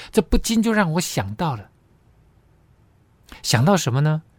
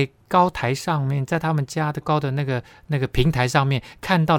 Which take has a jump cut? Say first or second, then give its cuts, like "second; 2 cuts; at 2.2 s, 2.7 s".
second; 1 cut; at 2.0 s